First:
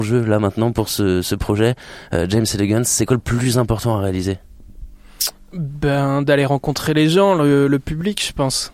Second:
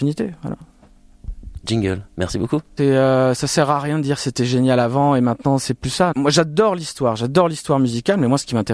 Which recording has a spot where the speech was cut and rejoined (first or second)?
second